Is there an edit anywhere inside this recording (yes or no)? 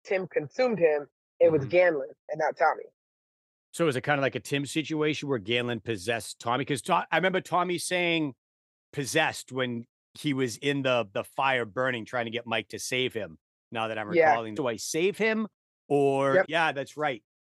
yes